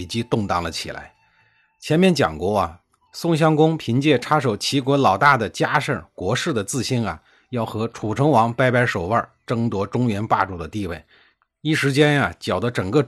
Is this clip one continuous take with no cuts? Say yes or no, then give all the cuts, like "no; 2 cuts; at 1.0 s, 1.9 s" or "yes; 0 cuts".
yes; 0 cuts